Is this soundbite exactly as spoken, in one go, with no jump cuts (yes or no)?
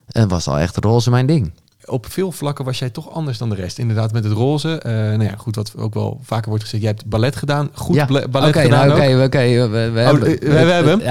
yes